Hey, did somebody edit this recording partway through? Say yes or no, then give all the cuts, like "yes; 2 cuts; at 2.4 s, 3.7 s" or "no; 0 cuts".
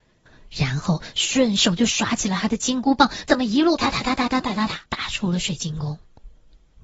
yes; 2 cuts; at 3.8 s, 4.9 s